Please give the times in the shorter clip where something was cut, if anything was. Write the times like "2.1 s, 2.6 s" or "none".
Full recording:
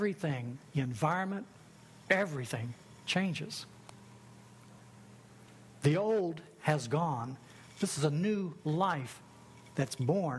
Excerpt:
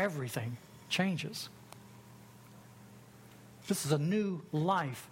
3.6 s